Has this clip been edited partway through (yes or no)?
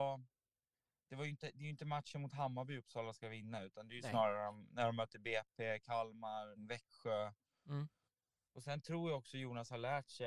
yes